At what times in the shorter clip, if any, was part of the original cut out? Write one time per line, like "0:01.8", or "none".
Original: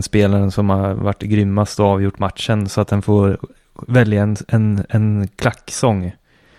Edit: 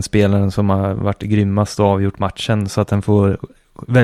none

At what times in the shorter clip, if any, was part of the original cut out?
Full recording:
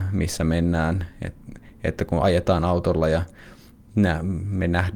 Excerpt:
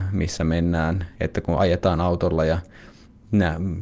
0:01.1

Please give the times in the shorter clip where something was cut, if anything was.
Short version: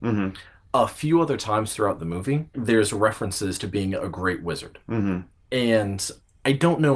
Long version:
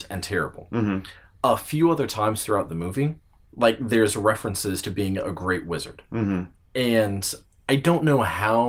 0:02.5

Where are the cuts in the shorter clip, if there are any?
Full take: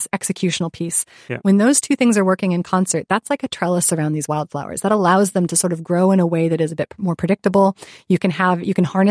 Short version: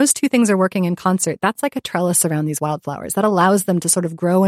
none

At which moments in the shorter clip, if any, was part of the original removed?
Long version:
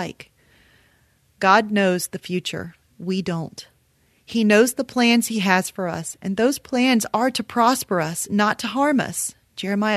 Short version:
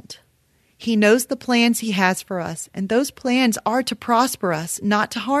none

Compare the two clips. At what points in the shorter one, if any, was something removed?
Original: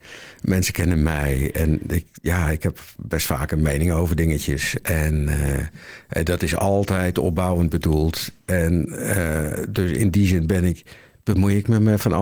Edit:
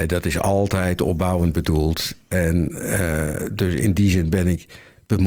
none

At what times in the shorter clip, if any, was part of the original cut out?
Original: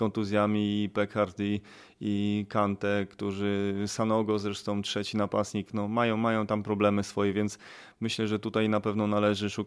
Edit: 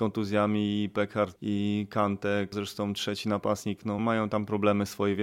0:01.4
0:02.5
0:04.0

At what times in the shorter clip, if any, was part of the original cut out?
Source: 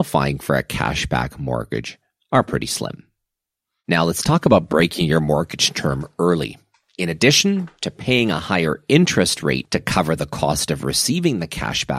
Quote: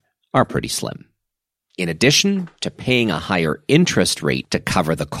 0:01.7

